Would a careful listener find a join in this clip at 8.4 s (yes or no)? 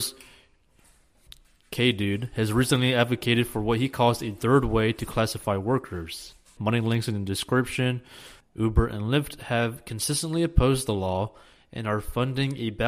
yes